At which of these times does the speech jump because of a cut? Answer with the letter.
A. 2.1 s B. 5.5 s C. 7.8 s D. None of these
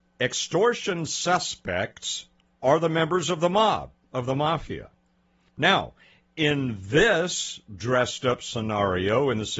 B